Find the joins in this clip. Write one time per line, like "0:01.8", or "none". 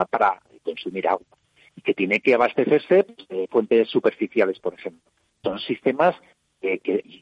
0:05.4